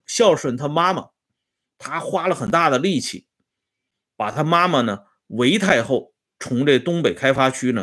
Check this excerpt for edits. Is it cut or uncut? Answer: uncut